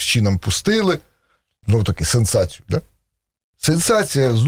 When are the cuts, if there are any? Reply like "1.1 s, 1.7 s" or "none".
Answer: 1.6 s